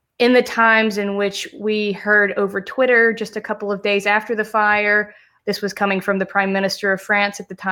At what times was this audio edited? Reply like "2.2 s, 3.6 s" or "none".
5.4 s